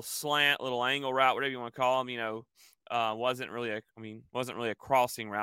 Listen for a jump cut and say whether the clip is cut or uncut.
uncut